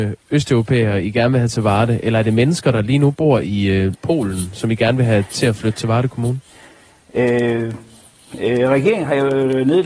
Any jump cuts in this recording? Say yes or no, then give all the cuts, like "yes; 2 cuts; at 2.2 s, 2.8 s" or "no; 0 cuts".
yes; 1 cut; at 3.9 s